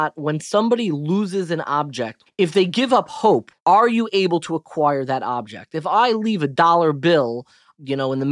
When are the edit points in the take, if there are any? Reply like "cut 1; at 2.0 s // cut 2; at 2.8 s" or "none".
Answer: cut 1; at 2.3 s // cut 2; at 3.5 s